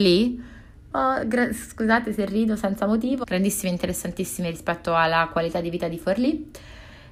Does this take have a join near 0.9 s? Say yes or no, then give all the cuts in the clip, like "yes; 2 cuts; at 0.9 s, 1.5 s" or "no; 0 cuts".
yes; 2 cuts; at 0.9 s, 3.2 s